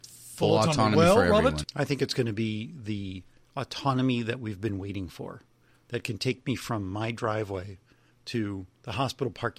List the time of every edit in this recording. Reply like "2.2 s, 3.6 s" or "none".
1.6 s